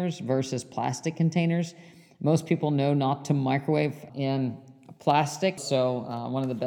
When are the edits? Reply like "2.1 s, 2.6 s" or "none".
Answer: 4.1 s, 5.6 s